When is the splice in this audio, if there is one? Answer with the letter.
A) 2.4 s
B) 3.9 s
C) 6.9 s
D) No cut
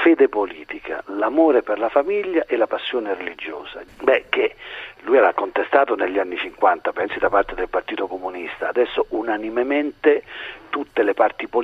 B